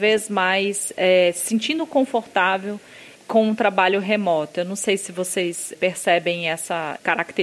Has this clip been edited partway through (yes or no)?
no